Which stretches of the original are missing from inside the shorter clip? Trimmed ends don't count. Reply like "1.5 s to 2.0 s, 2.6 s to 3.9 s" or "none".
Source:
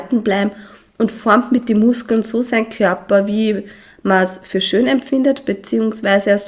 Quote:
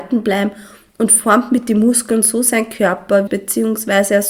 3.3 s to 5.4 s

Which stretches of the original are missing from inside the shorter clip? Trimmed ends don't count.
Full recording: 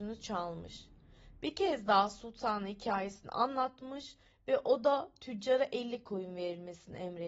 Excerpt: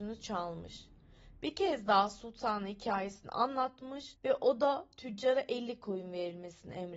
4.1 s to 4.4 s

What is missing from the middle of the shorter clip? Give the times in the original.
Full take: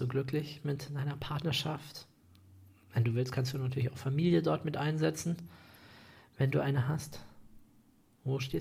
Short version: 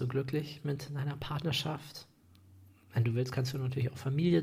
none

